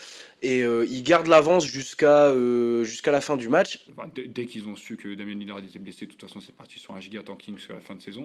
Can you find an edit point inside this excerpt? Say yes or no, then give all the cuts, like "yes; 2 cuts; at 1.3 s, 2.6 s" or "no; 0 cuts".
yes; 1 cut; at 3.9 s